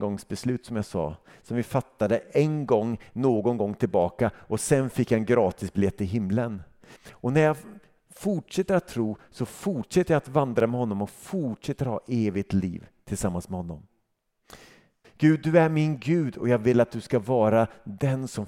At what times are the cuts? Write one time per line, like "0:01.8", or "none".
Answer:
0:07.0
0:15.0